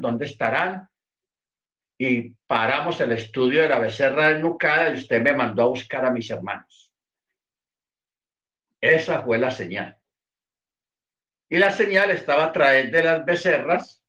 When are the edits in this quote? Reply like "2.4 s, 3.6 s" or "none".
none